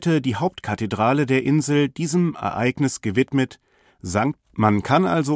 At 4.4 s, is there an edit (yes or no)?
yes